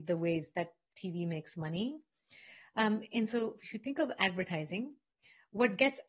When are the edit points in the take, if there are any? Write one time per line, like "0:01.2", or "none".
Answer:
none